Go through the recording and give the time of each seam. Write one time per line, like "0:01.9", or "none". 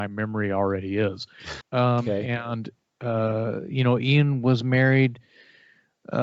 0:01.6